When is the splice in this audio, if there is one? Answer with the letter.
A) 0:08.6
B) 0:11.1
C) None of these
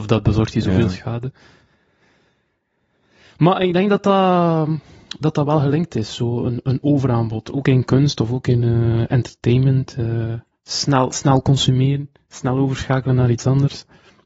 C